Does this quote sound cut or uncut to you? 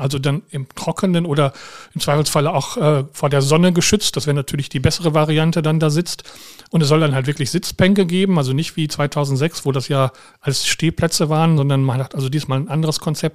uncut